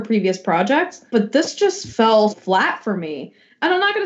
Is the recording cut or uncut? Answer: cut